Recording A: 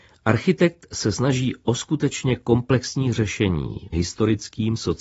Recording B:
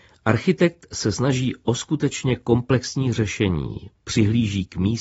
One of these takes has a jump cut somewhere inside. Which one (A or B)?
A